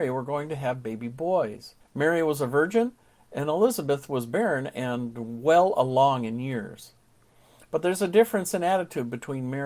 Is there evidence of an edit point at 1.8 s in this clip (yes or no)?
yes